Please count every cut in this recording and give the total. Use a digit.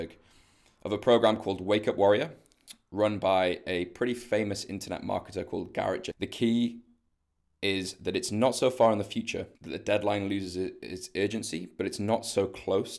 2